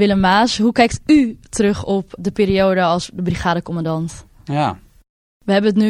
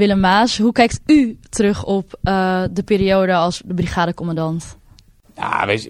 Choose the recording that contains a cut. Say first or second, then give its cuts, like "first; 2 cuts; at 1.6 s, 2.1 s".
first; 2 cuts; at 2.2 s, 4.5 s